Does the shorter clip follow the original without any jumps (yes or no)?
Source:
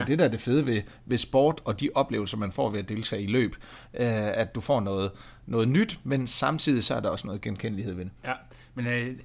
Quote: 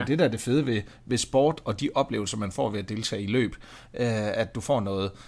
yes